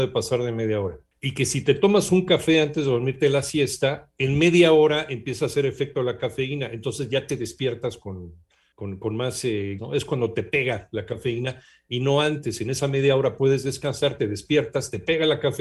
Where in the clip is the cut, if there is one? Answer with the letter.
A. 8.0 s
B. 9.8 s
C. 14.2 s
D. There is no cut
B